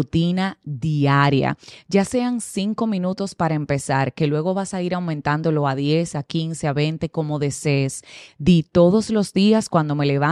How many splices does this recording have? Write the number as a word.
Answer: one